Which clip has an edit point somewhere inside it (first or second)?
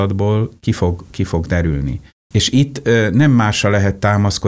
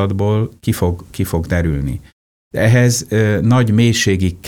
first